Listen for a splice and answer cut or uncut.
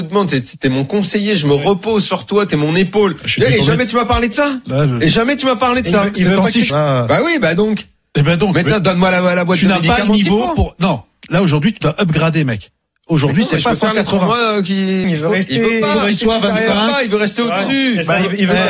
cut